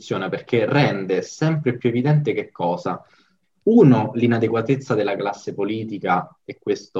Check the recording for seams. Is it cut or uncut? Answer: uncut